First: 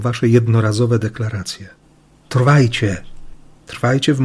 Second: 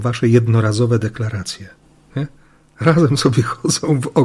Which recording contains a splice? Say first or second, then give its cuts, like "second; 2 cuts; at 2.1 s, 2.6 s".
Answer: second; 1 cut; at 2.1 s